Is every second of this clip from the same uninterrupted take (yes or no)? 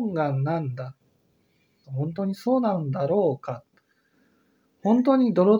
no